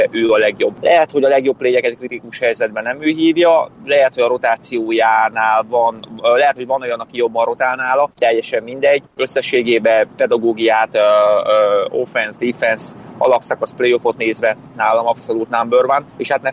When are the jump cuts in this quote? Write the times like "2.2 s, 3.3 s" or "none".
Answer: none